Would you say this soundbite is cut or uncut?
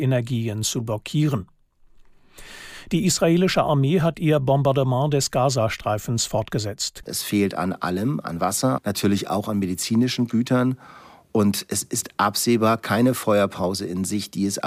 cut